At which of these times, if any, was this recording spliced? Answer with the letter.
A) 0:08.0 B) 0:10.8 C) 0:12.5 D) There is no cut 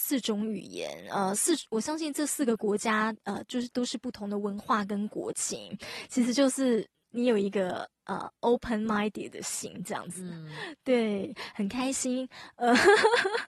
D